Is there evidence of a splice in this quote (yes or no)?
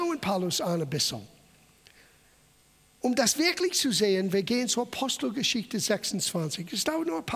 no